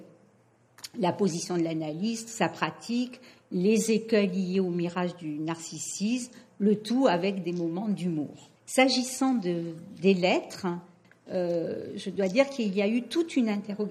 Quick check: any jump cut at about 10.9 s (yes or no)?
no